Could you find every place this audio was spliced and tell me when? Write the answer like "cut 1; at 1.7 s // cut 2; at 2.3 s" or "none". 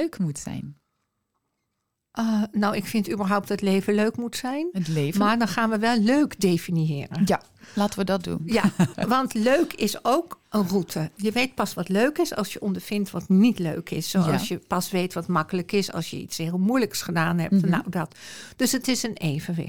cut 1; at 8.9 s